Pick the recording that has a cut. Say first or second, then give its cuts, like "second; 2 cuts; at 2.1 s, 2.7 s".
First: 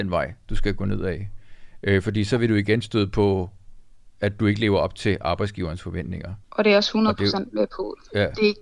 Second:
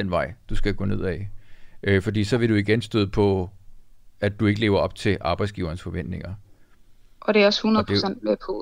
first; 1 cut; at 6.4 s